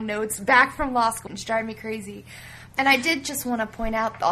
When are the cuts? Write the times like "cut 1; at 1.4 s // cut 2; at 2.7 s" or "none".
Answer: cut 1; at 1.3 s // cut 2; at 2.7 s